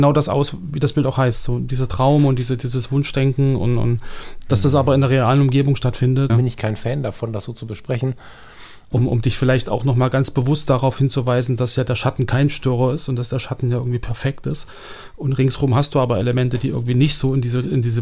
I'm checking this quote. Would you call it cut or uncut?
cut